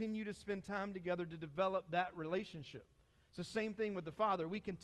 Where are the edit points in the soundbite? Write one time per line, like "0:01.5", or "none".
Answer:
none